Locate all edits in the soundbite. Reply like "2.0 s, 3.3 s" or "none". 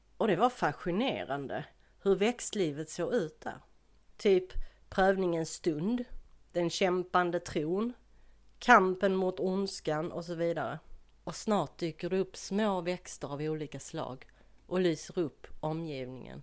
4.1 s, 11.2 s